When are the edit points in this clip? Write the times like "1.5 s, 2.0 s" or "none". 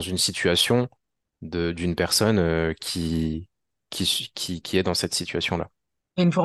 none